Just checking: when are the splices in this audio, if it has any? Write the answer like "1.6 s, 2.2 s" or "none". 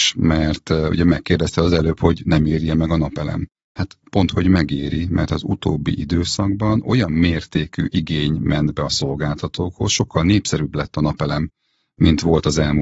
none